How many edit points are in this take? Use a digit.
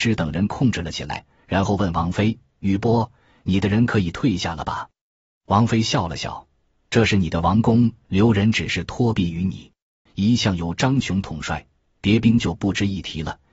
2